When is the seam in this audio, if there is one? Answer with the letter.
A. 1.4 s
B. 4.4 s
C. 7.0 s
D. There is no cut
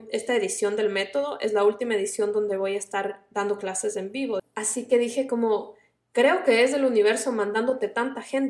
B